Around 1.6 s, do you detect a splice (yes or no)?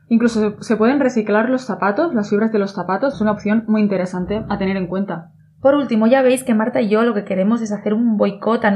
no